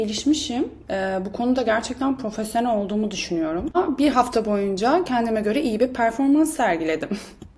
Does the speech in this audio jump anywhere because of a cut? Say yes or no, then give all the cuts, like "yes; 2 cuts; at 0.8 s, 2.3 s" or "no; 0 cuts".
no; 0 cuts